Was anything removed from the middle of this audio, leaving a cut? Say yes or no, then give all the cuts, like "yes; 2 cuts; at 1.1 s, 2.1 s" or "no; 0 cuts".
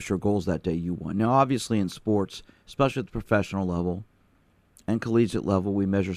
no; 0 cuts